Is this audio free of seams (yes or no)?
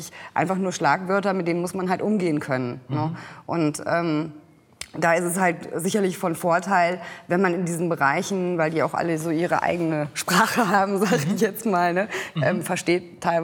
no